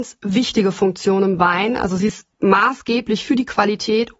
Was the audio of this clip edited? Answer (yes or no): no